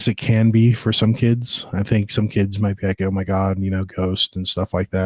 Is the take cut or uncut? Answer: uncut